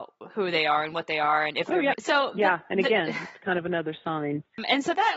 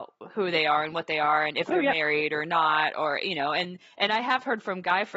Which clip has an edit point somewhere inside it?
first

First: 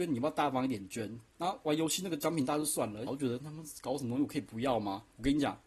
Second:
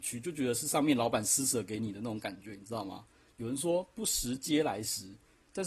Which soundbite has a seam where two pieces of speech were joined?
first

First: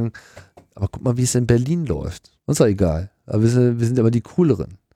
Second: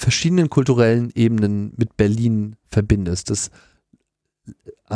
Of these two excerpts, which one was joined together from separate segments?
first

